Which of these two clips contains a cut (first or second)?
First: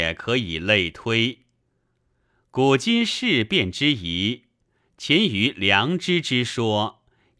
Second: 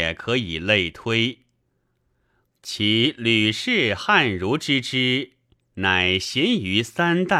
second